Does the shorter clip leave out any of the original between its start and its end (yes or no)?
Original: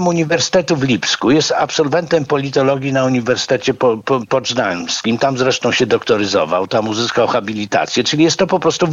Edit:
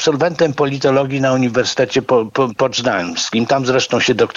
no